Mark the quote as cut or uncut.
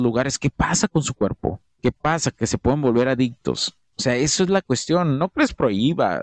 uncut